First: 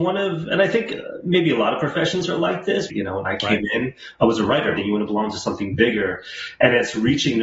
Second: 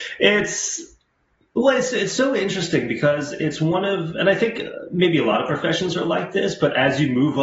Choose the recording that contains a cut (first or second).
first